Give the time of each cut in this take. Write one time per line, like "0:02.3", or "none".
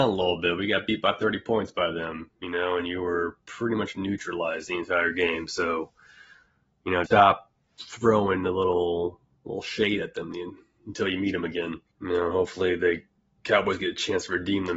0:07.1
0:11.9

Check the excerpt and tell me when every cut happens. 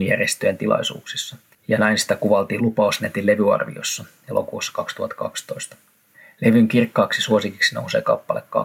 0:01.5

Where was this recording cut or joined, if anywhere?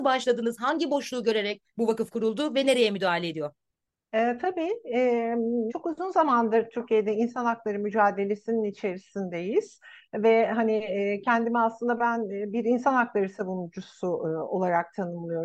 0:05.7

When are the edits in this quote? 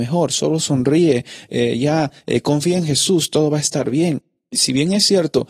none

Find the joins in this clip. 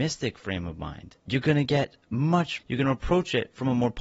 0:01.2
0:02.6

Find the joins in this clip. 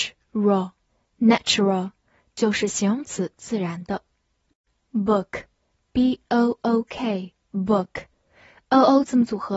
none

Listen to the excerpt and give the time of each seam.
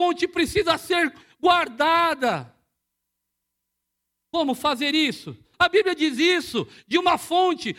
0:05.5

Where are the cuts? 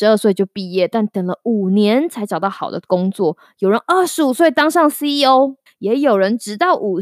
0:05.7

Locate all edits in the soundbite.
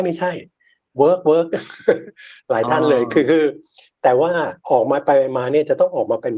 0:04.6

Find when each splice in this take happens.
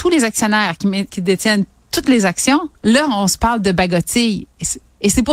none

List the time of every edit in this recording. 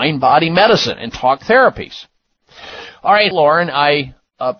0:03.3

